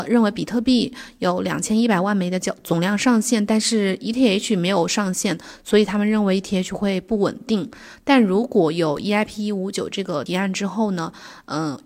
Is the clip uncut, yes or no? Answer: no